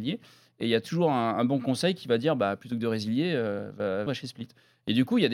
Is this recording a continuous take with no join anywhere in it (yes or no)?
no